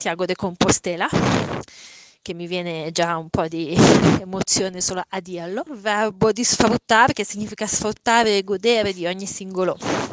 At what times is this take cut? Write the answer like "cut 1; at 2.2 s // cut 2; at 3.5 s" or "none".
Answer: cut 1; at 5.7 s